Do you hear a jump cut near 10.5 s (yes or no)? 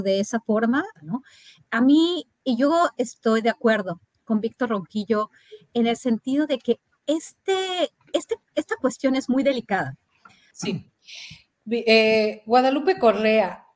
yes